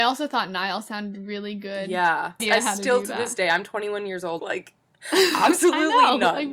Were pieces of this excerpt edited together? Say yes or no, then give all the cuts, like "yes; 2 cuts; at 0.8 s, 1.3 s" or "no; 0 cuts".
yes; 2 cuts; at 2.4 s, 4.4 s